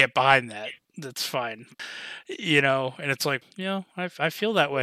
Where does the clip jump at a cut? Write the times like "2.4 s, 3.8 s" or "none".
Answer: 1.8 s, 3.4 s